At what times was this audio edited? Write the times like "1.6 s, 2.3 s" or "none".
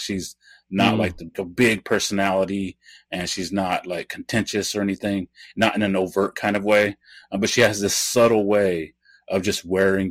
1.3 s